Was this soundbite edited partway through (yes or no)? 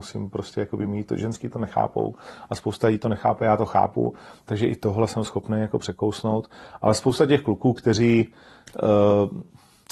no